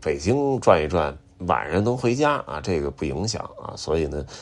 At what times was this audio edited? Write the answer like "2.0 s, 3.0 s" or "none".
none